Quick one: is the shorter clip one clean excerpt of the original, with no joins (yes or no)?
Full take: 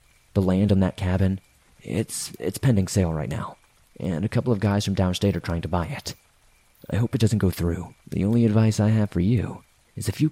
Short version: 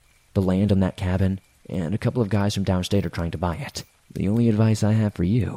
no